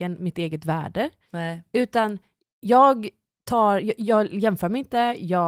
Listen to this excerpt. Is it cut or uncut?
uncut